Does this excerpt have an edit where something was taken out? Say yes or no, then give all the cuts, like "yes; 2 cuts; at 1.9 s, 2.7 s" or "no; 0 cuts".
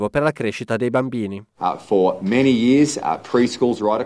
yes; 1 cut; at 1.6 s